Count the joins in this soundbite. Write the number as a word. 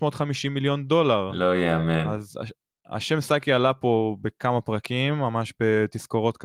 zero